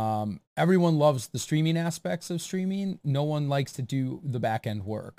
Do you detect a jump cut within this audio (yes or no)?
no